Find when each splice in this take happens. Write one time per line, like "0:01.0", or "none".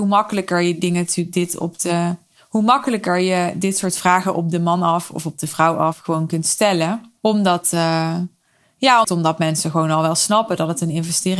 0:07.2
0:09.0